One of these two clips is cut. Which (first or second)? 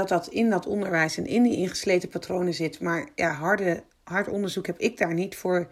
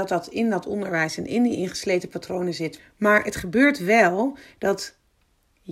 second